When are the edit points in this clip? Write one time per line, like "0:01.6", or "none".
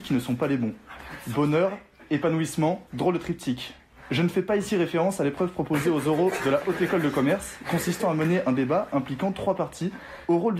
0:02.9